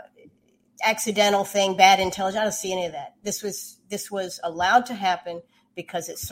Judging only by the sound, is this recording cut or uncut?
uncut